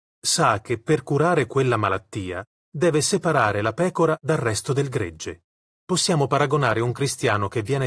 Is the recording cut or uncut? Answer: cut